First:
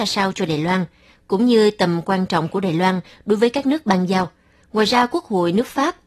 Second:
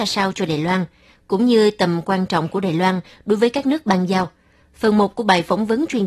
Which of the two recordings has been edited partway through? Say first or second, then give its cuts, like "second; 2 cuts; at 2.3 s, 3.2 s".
first; 1 cut; at 4.6 s